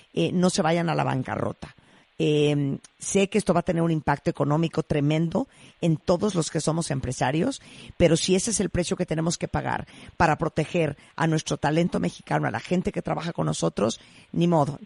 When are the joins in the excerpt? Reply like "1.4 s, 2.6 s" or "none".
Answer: none